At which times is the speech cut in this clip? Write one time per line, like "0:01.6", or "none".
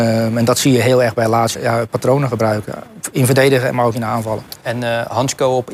0:01.5